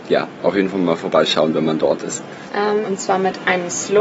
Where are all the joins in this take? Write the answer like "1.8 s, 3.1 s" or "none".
2.8 s